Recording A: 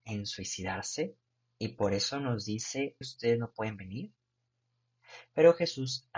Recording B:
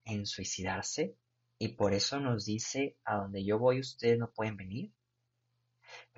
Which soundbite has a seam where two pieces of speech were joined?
A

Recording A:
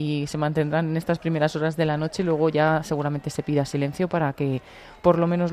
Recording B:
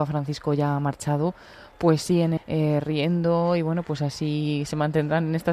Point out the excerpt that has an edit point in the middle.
B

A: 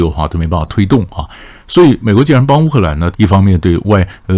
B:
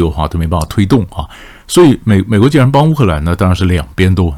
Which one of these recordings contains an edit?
A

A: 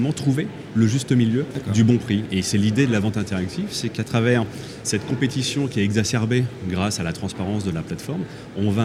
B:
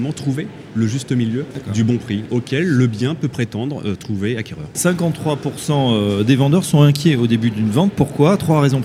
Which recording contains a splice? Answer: B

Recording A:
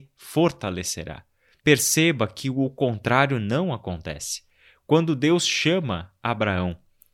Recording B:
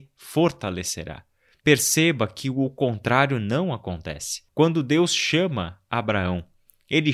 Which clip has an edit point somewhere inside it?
B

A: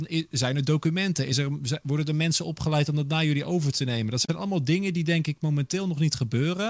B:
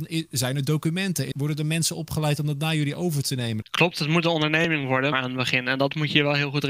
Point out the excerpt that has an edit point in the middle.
B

